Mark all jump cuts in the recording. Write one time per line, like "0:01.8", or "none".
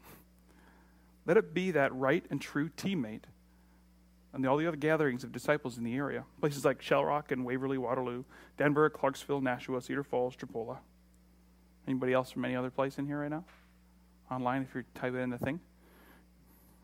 none

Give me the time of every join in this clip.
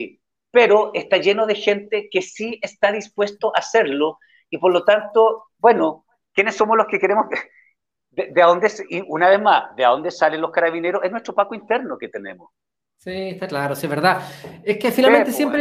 0:06.3

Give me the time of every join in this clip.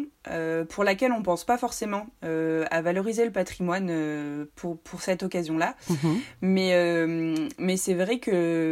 none

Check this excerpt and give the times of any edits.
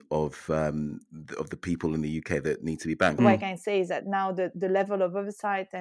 0:03.2

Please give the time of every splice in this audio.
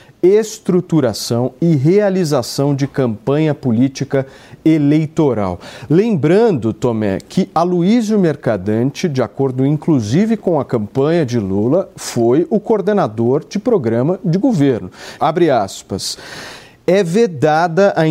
0:15.2

